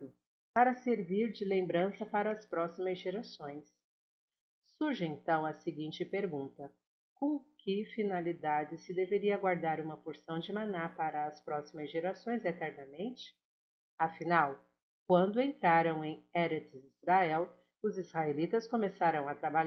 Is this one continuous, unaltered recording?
yes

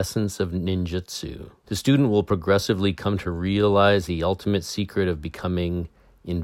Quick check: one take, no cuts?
no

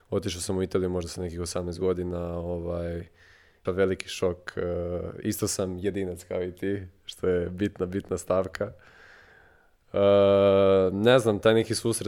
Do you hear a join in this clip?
yes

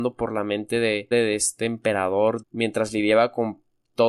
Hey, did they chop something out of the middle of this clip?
yes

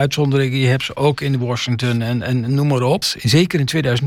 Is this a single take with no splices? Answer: no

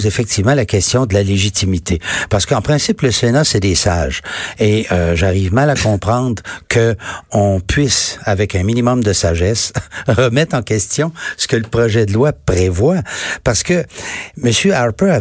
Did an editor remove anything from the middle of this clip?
no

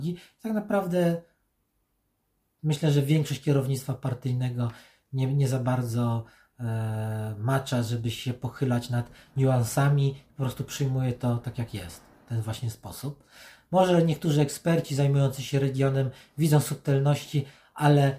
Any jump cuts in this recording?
no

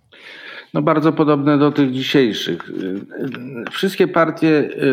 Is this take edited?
no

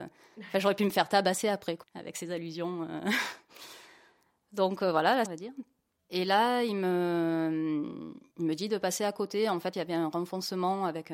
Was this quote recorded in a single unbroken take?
no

